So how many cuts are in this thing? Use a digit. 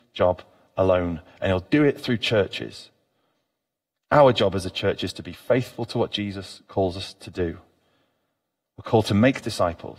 0